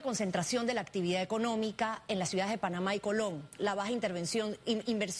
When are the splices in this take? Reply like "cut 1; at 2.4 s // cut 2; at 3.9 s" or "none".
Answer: cut 1; at 3.6 s